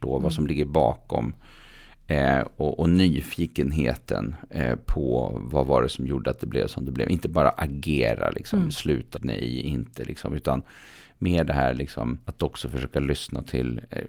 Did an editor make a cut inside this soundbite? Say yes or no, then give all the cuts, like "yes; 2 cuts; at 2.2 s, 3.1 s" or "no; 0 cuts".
yes; 2 cuts; at 9.1 s, 12.2 s